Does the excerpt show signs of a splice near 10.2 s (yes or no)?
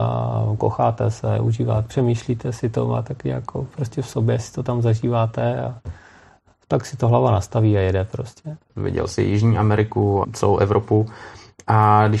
yes